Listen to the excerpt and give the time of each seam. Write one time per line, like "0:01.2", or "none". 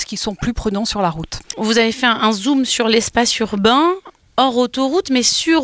none

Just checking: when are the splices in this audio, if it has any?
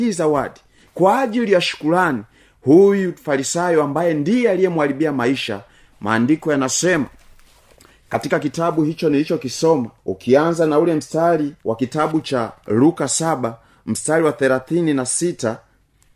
0:10.0
0:11.6

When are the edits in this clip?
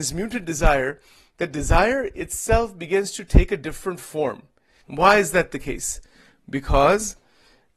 0:04.8

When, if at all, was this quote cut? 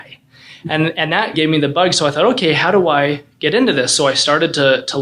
0:01.3

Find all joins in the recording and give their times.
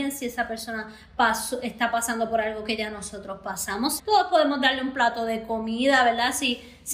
0:04.0

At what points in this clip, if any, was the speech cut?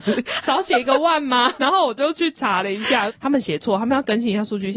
0:01.6
0:03.1

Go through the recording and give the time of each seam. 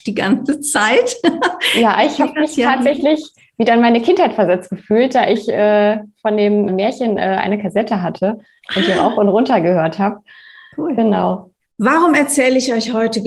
0:06.7
0:11.7

